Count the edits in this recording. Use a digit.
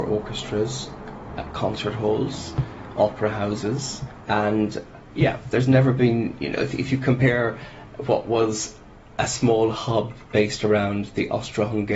1